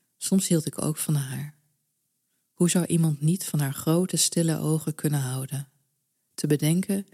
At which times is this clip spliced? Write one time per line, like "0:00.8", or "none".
0:06.1